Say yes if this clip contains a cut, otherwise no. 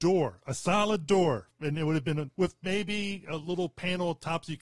yes